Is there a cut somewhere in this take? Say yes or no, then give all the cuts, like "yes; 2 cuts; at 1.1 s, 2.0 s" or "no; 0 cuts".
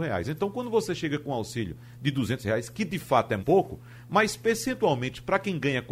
yes; 1 cut; at 3.4 s